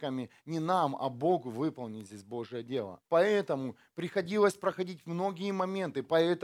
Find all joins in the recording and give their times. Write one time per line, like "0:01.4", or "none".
0:03.0